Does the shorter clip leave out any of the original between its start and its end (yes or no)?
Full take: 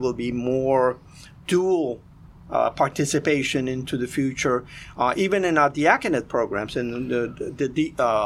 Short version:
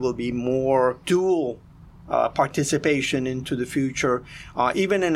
yes